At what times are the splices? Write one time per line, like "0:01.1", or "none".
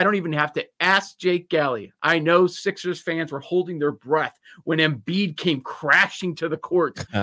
none